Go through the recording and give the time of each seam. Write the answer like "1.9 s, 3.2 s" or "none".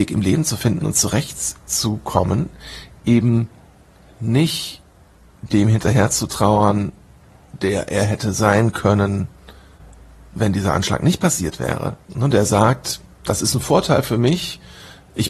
none